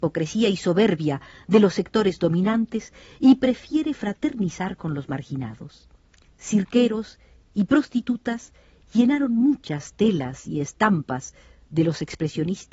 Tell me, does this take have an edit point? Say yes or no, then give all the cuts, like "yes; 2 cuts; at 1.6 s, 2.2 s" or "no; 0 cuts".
no; 0 cuts